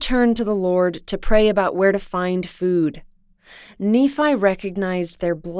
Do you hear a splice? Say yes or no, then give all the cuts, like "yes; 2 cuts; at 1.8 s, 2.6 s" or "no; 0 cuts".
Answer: no; 0 cuts